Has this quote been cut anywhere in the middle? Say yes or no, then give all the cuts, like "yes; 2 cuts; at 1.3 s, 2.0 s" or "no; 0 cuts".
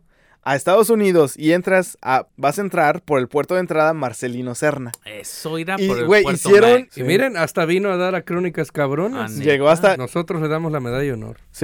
yes; 3 cuts; at 2.3 s, 6.9 s, 9.9 s